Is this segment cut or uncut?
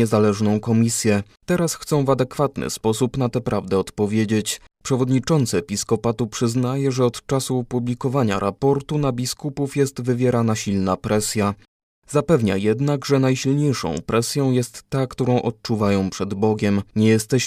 uncut